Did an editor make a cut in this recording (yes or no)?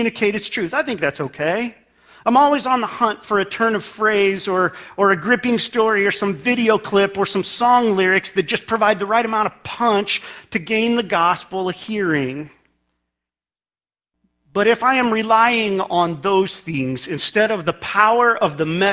no